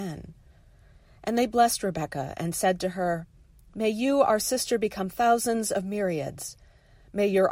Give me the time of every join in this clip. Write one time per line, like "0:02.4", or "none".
none